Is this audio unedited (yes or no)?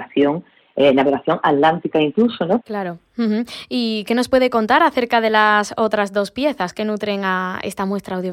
no